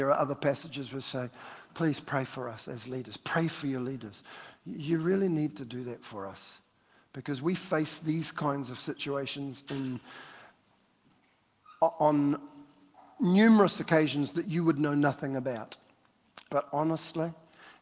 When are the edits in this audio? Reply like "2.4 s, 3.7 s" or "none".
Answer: 16.5 s